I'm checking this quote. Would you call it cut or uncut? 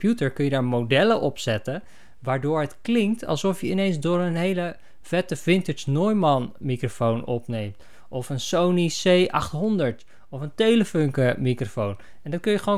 uncut